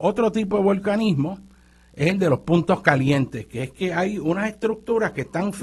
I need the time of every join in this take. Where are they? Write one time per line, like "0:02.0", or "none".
none